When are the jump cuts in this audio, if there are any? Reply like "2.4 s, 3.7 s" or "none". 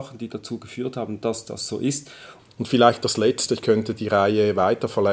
2.4 s, 4.0 s